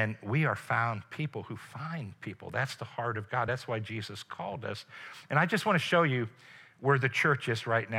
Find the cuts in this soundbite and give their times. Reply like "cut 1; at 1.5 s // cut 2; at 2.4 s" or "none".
none